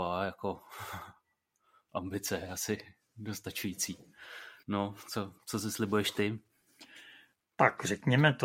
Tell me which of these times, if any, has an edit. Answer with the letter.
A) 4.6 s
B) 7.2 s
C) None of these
A